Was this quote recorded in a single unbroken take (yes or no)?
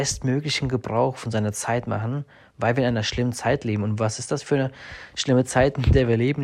yes